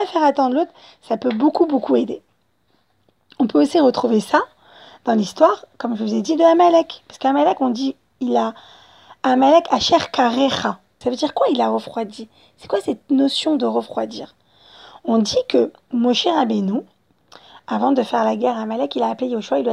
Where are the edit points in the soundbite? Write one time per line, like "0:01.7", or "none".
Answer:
0:11.0